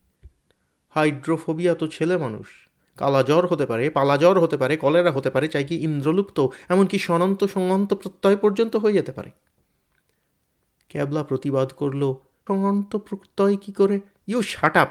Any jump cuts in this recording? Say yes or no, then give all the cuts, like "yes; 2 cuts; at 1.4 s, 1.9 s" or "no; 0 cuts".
yes; 1 cut; at 12.5 s